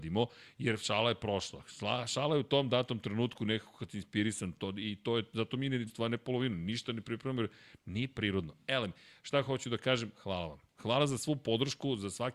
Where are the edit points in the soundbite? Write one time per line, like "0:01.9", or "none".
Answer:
0:05.9

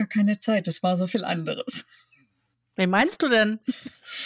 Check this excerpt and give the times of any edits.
none

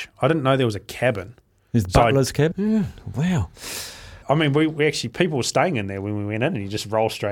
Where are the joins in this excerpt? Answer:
0:02.5
0:04.2

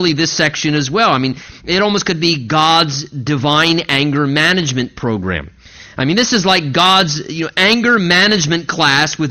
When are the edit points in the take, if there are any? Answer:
none

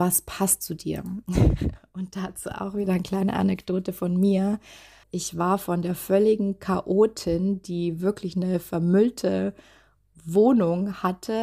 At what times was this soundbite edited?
0:05.0

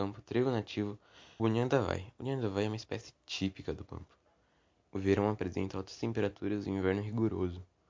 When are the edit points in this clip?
0:01.4
0:04.8

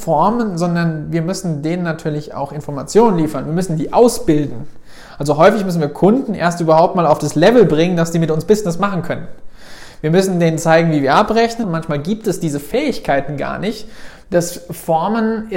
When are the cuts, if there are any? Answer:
0:11.6
0:14.2

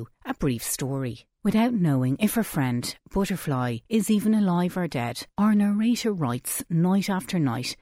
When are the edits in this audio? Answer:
none

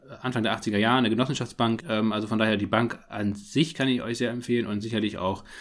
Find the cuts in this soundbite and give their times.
0:01.8

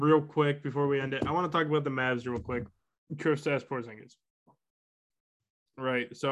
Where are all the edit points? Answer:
none

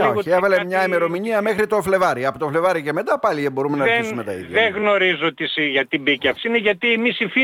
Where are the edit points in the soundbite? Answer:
0:06.4

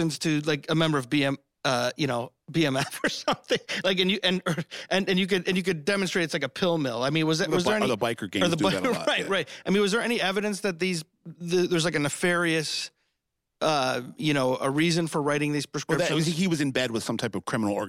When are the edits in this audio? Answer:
none

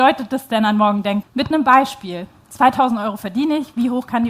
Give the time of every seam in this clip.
0:01.2

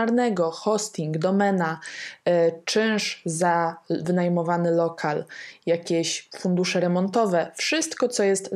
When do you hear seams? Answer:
none

